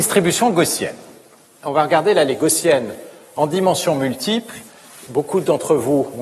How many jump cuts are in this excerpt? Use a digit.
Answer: 2